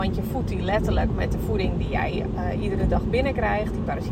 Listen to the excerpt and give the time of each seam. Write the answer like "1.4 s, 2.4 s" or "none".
none